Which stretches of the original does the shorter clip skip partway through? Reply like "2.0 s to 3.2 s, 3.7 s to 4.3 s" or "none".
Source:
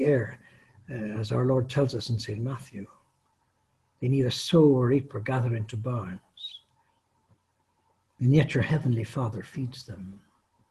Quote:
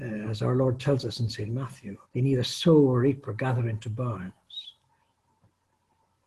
2.9 s to 3.9 s

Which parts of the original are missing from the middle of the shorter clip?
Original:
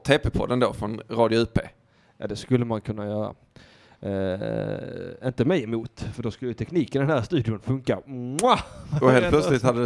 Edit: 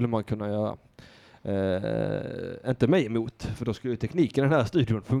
none

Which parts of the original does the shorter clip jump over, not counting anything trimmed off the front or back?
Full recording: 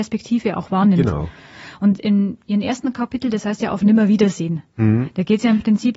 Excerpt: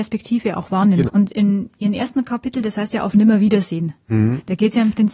1.1 s to 1.7 s

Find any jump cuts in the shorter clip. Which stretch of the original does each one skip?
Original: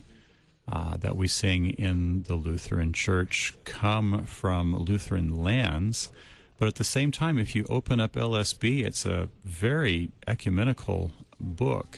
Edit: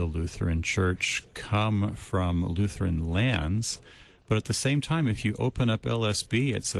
none

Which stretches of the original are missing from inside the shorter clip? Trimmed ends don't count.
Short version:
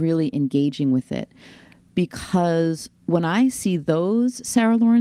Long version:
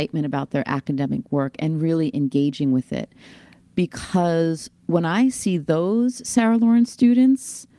none

